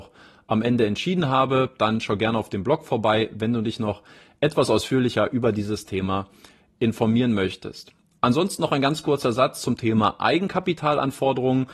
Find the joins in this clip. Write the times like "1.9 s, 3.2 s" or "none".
none